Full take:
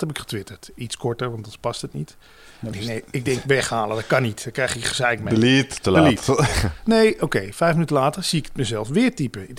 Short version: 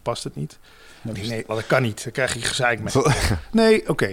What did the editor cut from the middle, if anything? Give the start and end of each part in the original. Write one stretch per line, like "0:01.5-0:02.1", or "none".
0:03.1-0:03.9
0:05.3-0:06.2